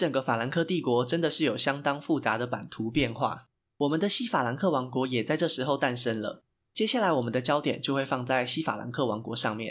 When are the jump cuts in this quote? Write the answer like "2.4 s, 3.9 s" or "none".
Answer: none